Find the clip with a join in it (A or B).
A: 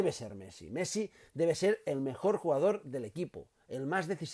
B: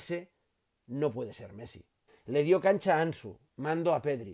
B